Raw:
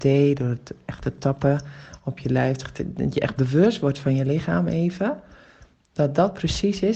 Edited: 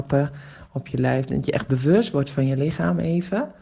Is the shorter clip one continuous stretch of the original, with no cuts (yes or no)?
no